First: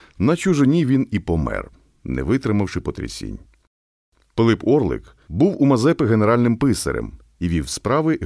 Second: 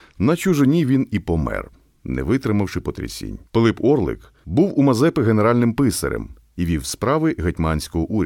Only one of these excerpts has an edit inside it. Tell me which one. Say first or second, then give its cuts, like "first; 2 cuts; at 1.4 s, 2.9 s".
second; 1 cut; at 3.5 s